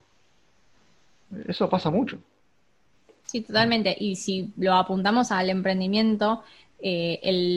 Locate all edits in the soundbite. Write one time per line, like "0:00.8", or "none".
none